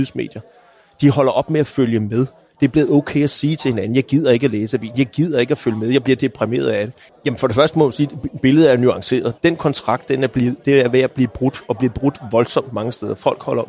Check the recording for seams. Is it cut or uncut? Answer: cut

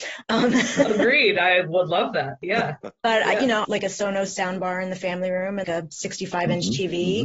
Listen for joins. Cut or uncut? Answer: cut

